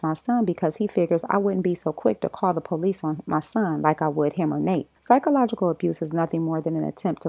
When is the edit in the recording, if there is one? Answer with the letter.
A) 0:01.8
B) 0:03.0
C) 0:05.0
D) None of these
C